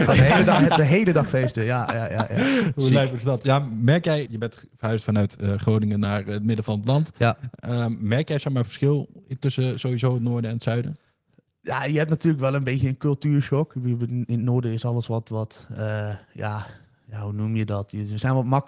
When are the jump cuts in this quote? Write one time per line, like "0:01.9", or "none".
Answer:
0:04.3